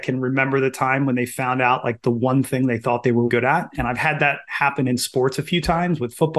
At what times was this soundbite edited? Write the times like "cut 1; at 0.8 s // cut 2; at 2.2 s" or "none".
cut 1; at 3.3 s